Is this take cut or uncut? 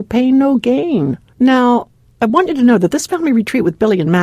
cut